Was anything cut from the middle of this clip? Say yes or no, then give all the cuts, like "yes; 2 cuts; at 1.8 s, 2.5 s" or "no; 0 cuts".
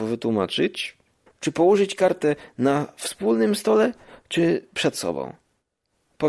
yes; 1 cut; at 1.3 s